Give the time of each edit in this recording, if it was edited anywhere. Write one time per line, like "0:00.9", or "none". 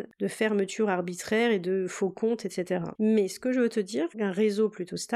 0:02.9
0:04.1